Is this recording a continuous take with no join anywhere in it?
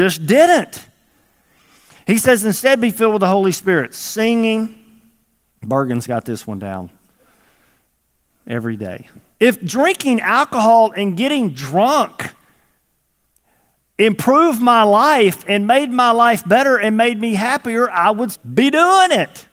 no; 2 cuts; at 9.4 s, 18.3 s

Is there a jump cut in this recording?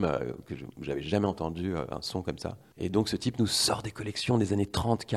no; 0 cuts

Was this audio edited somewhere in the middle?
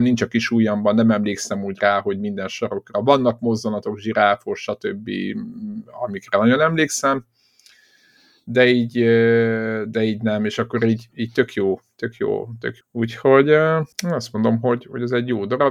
yes; 2 cuts; at 12.8 s, 13.9 s

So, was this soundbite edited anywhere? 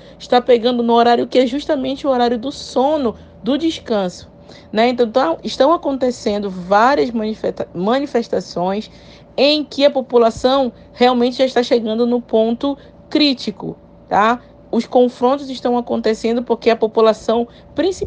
no; 0 cuts

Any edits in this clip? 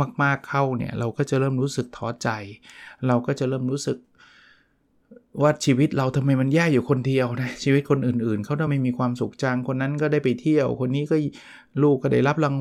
no; 0 cuts

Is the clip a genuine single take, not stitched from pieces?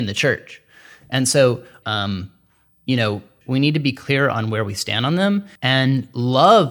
no; 3 cuts; at 1.8 s, 3.4 s, 5.6 s

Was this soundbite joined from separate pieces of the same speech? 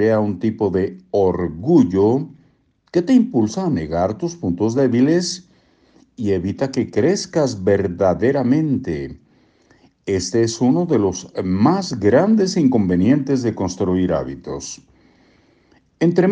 no; 0 cuts

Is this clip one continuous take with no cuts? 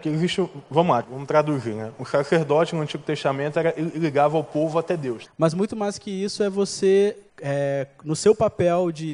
no; 3 cuts; at 1.0 s, 5.2 s, 7.3 s

